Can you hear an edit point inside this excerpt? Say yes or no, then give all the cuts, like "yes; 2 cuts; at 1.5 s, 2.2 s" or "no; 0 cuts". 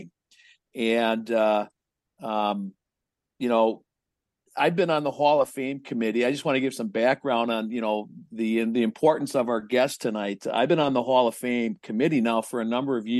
no; 0 cuts